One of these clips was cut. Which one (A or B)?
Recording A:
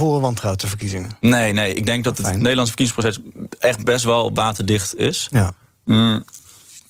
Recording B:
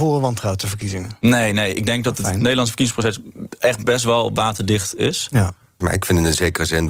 B